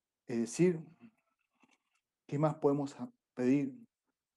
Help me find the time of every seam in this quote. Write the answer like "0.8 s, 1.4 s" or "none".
none